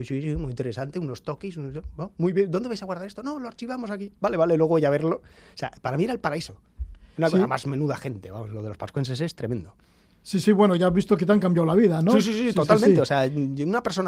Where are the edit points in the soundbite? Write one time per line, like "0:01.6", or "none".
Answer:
none